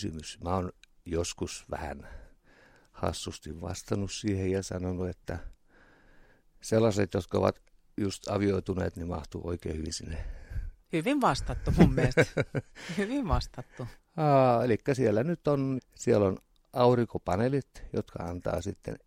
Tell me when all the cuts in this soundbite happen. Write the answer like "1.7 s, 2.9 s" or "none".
14.0 s, 15.8 s